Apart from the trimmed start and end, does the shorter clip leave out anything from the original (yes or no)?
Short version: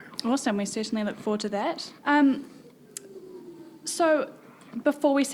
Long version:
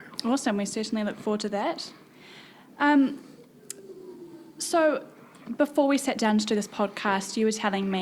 yes